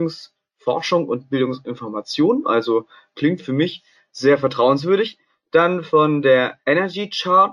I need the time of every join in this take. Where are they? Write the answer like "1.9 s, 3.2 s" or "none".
none